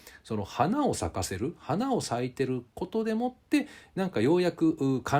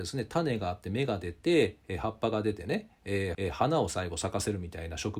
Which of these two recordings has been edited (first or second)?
second